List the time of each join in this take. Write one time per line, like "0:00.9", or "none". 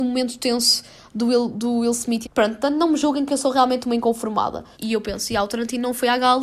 0:02.2
0:04.7